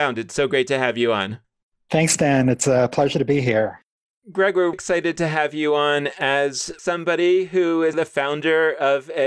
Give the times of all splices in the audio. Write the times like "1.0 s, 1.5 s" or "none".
4.7 s, 7.9 s